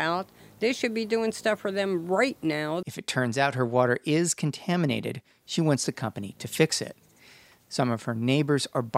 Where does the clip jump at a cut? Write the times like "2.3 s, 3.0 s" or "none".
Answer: 2.8 s